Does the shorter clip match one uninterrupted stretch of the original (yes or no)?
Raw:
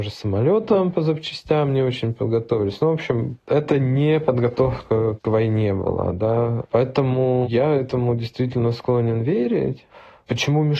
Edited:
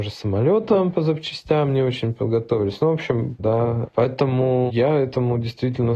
no